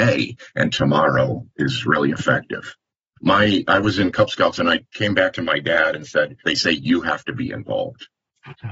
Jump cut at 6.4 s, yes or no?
yes